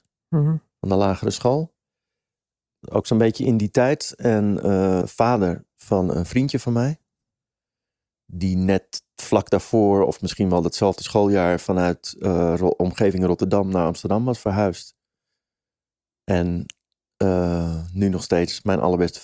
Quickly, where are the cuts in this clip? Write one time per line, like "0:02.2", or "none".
0:05.0